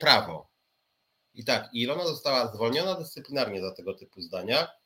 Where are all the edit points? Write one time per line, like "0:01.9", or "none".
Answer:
none